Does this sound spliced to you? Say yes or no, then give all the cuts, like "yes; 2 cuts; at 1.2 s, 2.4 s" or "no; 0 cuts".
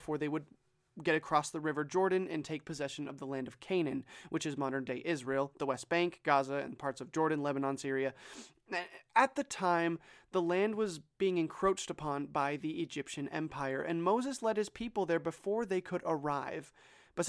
no; 0 cuts